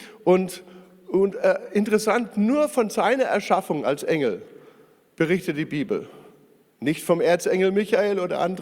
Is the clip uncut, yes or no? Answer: yes